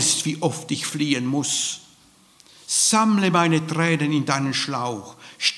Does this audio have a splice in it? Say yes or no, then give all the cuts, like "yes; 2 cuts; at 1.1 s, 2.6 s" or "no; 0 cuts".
no; 0 cuts